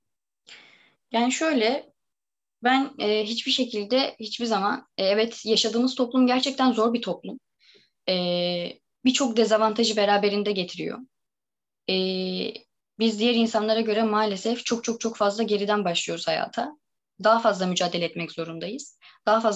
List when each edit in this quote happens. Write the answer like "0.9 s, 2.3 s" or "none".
none